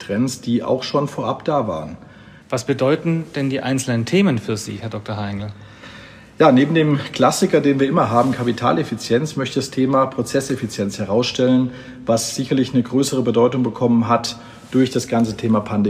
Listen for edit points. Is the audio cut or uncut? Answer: cut